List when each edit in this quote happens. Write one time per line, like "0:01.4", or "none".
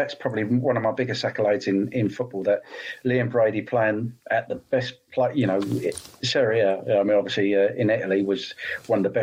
0:04.2